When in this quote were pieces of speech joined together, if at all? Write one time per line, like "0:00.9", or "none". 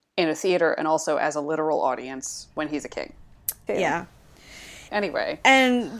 0:03.7
0:04.9